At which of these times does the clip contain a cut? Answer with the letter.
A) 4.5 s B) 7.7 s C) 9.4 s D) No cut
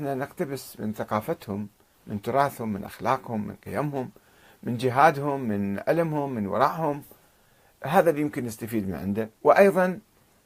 C